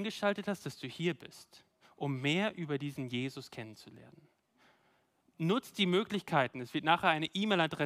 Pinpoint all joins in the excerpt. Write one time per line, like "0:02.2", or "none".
none

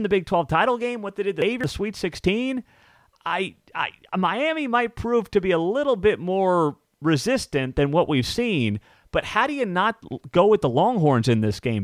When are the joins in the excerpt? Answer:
none

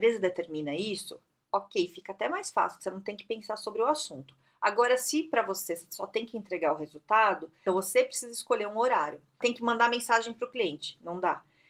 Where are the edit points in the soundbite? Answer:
0:07.7
0:09.4

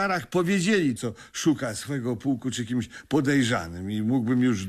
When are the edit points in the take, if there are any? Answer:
0:01.0

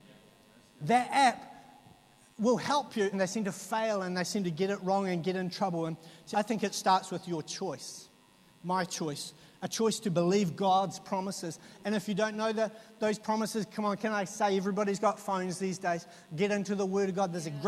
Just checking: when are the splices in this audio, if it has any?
0:03.1
0:06.3

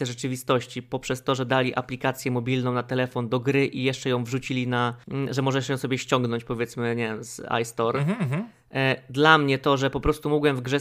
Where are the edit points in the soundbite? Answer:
none

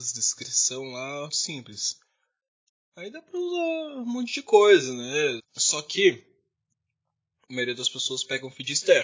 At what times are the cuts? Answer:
0:01.3
0:05.4

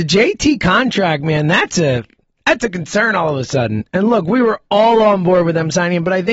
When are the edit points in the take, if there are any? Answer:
none

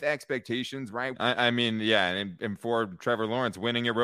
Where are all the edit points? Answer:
0:01.1

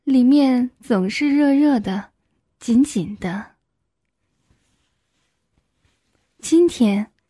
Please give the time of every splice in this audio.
none

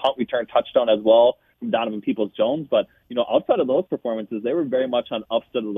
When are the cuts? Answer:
none

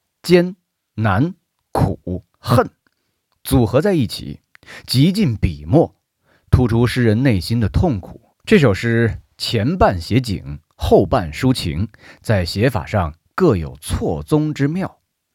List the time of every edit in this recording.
0:08.3

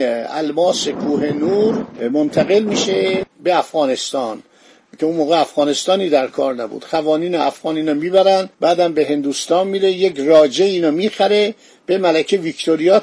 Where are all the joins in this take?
0:08.5

